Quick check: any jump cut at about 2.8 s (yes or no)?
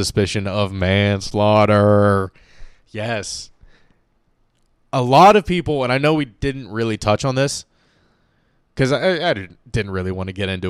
no